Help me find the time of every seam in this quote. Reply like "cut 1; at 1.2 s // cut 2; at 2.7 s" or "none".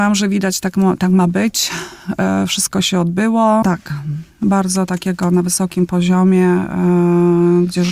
cut 1; at 3.6 s